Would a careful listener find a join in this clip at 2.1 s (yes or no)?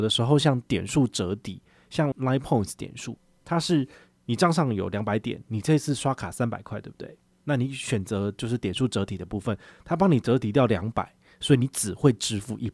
yes